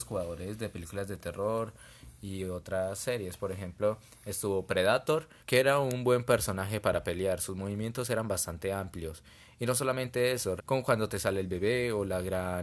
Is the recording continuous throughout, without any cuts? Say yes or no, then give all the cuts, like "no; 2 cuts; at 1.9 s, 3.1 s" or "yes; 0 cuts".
no; 2 cuts; at 5.4 s, 10.6 s